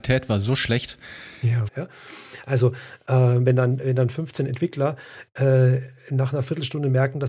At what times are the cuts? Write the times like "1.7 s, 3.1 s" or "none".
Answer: 1.7 s